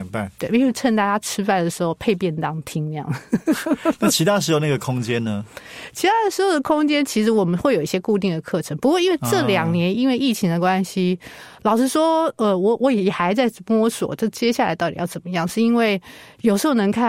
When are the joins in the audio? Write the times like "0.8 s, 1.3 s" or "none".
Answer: none